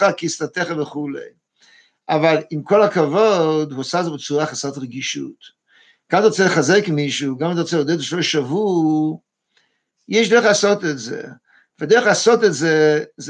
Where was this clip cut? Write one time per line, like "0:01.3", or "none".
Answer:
none